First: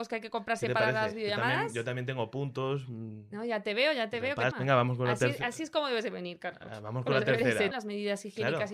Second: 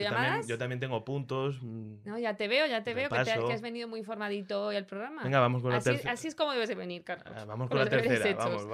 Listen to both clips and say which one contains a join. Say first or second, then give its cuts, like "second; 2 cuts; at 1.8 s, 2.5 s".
first; 2 cuts; at 4.5 s, 7.7 s